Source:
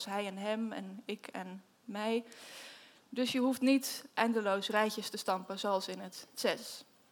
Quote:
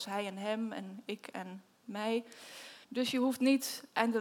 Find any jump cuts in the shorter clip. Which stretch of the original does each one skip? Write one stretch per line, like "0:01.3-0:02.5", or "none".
0:02.8-0:03.0